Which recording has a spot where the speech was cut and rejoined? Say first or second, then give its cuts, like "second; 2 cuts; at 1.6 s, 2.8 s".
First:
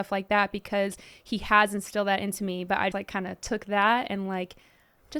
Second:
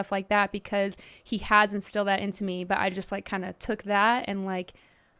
first; 1 cut; at 2.9 s